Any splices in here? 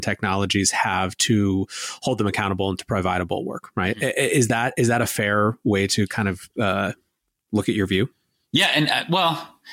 no; 0 cuts

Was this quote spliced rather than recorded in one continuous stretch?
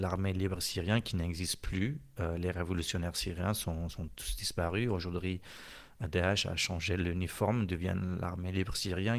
yes; 1 cut; at 4.1 s

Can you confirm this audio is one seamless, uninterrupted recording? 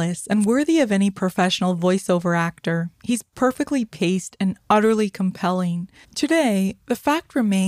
no; 1 cut; at 6.0 s

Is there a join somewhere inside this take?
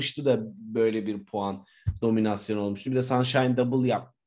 no; 0 cuts

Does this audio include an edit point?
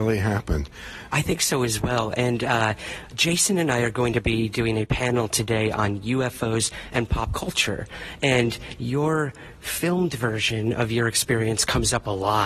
yes; 1 cut; at 1.1 s

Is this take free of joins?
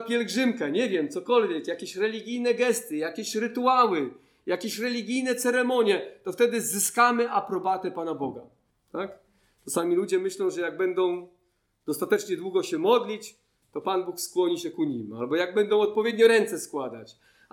no; 1 cut; at 8.7 s

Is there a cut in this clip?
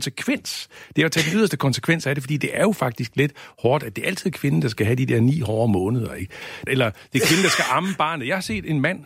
yes; 1 cut; at 6.7 s

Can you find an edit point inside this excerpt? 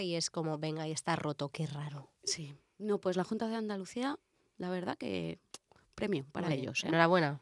no; 0 cuts

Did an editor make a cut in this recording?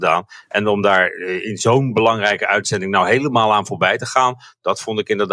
no; 0 cuts

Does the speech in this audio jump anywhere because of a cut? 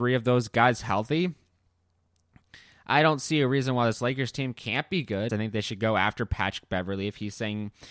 yes; 1 cut; at 5.3 s

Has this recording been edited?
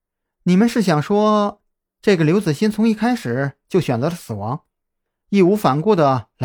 no; 0 cuts

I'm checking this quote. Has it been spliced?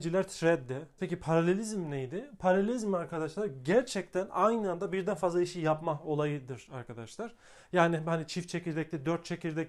yes; 1 cut; at 1.0 s

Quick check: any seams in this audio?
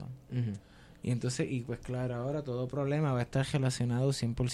no; 0 cuts

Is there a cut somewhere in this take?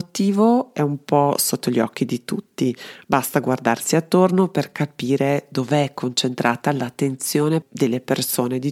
yes; 1 cut; at 7.6 s

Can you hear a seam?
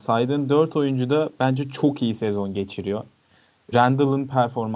yes; 1 cut; at 3.7 s

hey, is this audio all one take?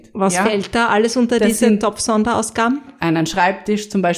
no; 1 cut; at 2.9 s

